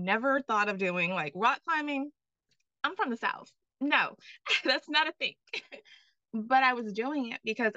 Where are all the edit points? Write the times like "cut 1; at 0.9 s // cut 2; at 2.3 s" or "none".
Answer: none